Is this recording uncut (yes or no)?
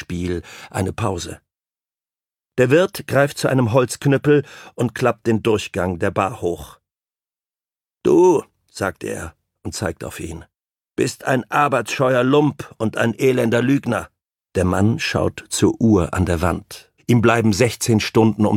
no